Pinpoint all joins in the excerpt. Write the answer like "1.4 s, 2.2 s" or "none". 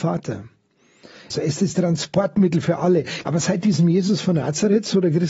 1.3 s, 3.2 s